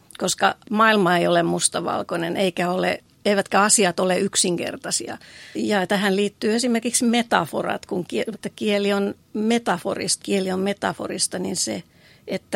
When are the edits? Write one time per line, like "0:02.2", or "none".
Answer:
0:05.5
0:08.3
0:10.2